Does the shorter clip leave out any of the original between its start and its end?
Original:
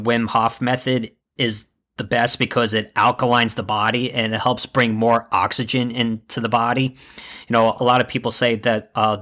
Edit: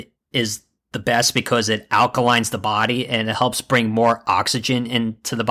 no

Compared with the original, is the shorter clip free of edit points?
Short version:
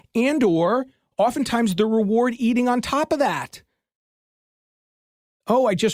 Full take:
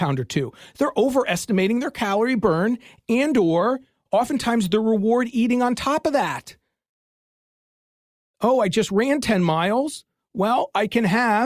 yes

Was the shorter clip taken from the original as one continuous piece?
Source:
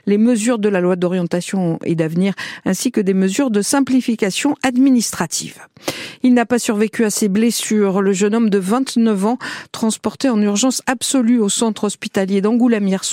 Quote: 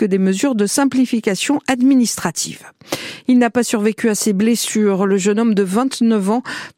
yes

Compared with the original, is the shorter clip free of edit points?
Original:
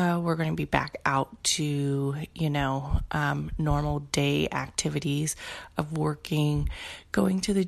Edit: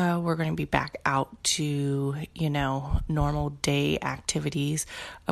no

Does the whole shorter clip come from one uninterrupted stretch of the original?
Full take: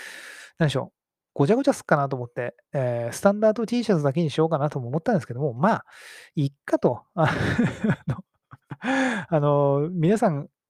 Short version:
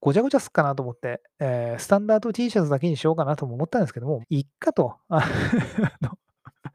no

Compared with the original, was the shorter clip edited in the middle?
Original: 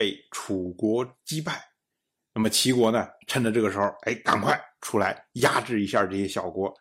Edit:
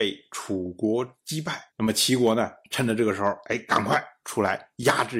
yes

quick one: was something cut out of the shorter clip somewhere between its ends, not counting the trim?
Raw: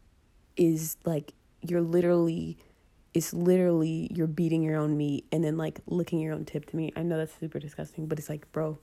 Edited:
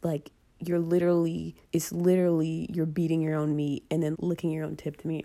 yes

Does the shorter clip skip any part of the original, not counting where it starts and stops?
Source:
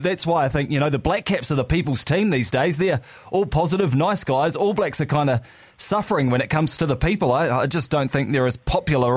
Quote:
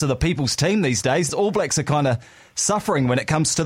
yes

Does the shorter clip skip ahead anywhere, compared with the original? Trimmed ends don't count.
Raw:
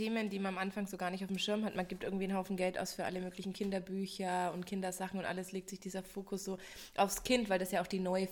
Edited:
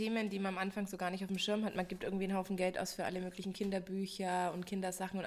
no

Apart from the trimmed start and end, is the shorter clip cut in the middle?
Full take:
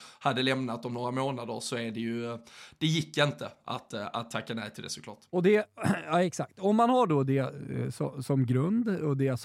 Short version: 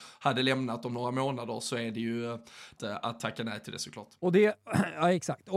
yes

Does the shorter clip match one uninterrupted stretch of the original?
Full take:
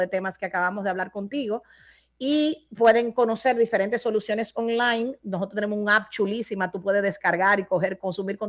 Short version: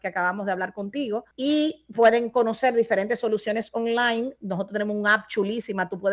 no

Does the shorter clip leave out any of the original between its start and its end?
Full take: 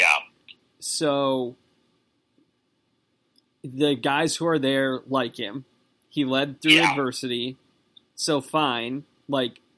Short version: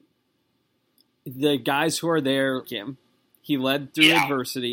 yes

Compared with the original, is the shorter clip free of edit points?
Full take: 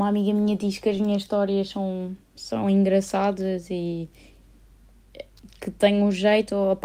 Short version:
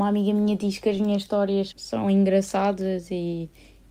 no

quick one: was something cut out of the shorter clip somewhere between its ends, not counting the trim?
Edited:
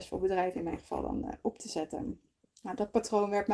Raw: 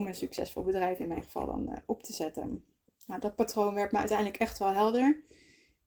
no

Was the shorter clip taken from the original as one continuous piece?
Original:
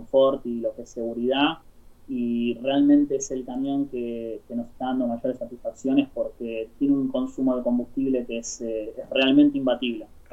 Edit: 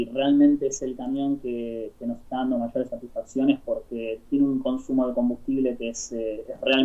yes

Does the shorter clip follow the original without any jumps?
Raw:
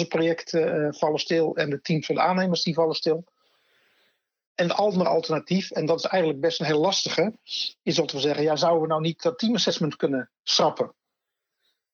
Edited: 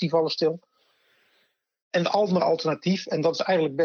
yes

